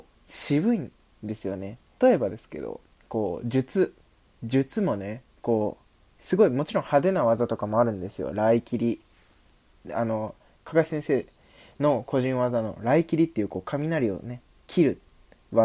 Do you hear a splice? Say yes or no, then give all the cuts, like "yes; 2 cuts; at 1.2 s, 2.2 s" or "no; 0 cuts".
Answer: yes; 1 cut; at 2.0 s